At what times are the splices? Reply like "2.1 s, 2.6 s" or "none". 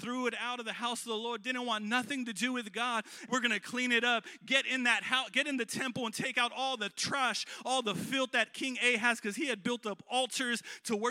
3.3 s